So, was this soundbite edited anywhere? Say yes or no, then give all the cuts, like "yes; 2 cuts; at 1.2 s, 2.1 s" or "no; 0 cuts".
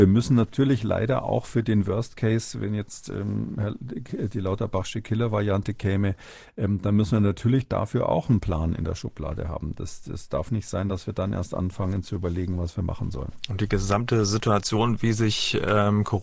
no; 0 cuts